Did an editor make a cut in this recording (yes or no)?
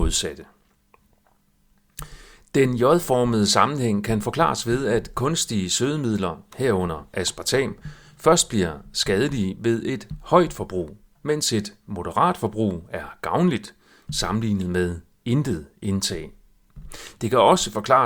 no